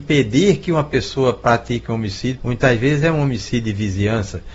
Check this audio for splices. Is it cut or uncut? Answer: cut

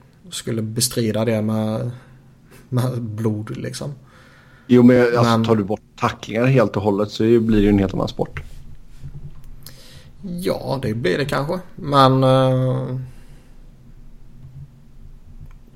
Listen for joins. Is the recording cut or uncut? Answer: uncut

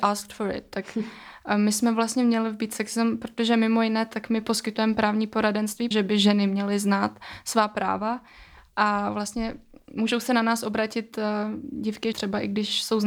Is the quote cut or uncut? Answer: cut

